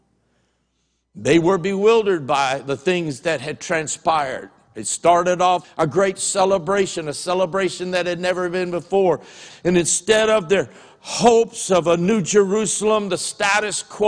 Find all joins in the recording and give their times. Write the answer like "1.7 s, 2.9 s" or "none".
5.6 s, 9.5 s